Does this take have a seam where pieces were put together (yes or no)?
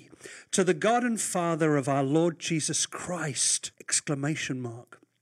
yes